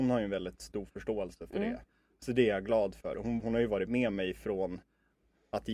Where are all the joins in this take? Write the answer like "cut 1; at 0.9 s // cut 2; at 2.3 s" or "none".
cut 1; at 3.4 s